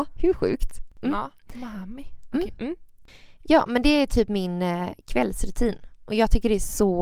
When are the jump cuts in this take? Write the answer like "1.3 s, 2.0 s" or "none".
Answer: none